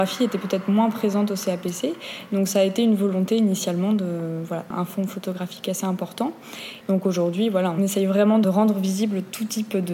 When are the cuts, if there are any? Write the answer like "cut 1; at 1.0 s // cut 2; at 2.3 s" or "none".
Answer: cut 1; at 4.7 s // cut 2; at 6.8 s